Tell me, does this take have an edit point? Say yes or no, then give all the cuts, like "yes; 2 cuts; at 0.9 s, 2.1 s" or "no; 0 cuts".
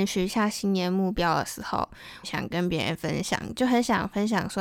yes; 1 cut; at 2.2 s